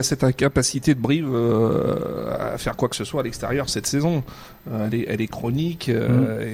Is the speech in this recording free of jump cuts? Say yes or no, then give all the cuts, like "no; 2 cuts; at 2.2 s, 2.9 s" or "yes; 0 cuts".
yes; 0 cuts